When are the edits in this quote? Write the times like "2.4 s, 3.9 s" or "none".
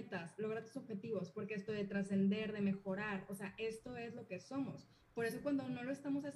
1.7 s